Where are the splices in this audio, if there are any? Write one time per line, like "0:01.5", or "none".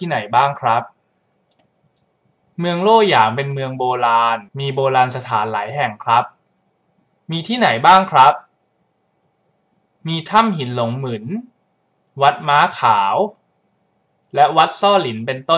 0:04.5